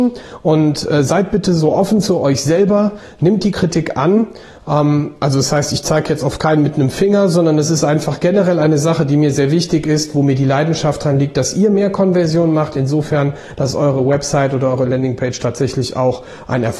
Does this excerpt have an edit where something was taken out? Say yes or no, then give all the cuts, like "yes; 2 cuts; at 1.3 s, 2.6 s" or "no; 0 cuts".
no; 0 cuts